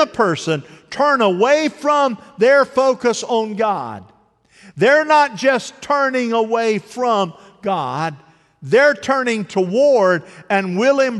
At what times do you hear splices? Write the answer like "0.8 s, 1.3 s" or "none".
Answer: none